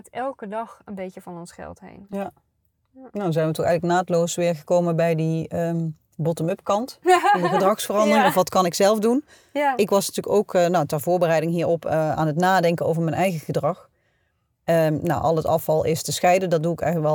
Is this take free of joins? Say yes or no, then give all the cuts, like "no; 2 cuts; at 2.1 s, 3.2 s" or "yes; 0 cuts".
yes; 0 cuts